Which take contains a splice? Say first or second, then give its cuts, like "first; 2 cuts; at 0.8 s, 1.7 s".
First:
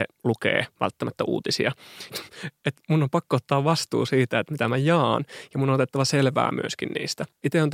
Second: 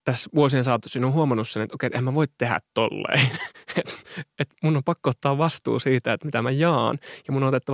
first; 1 cut; at 2.1 s